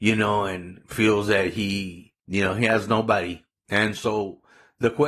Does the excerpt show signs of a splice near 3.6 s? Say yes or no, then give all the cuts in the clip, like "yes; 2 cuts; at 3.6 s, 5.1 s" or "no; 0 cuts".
no; 1 cut; at 2.2 s